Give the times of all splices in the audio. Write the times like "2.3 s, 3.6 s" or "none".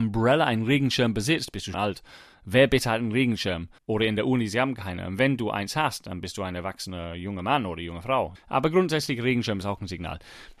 1.7 s, 3.8 s, 8.4 s